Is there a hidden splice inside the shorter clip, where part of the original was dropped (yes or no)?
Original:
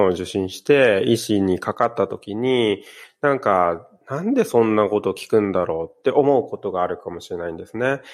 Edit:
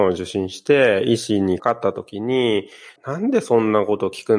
yes